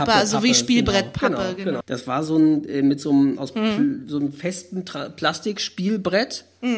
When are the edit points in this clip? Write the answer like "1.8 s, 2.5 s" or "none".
1.8 s